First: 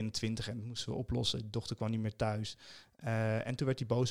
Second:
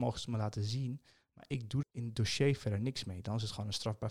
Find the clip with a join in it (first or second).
second